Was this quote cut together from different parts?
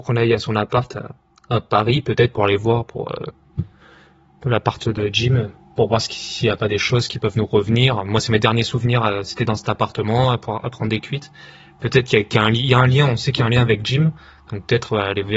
no; 0 cuts

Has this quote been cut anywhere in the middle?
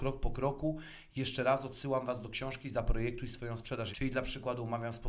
yes; 1 cut; at 3.9 s

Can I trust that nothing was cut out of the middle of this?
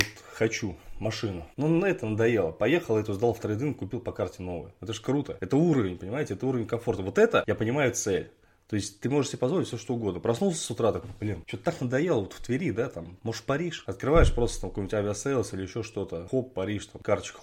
yes; 0 cuts

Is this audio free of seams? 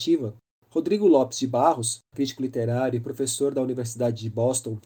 no; 1 cut; at 2.1 s

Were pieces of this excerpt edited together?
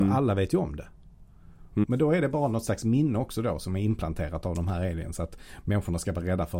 yes; 1 cut; at 1.8 s

